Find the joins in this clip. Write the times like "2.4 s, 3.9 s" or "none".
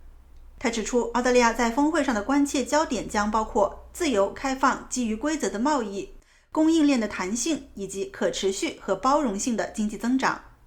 none